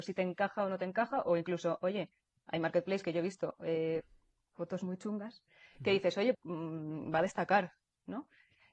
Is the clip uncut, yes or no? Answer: no